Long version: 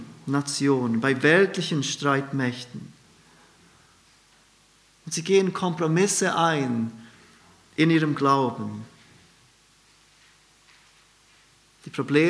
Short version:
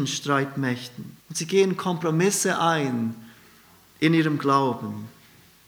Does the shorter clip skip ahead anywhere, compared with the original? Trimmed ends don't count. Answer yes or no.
yes